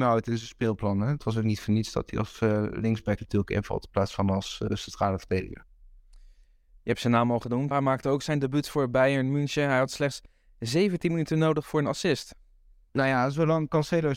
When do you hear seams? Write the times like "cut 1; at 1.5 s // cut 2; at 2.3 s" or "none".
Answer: cut 1; at 7.7 s // cut 2; at 12.9 s